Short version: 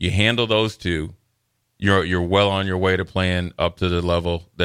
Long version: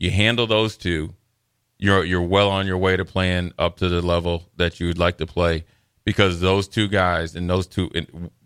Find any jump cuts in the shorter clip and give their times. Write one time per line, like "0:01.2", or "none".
none